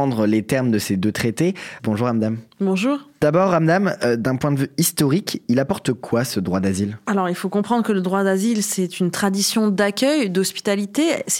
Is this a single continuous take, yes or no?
no